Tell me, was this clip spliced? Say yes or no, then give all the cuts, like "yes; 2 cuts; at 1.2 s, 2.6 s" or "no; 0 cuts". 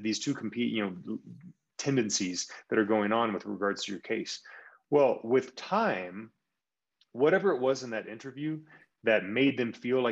no; 0 cuts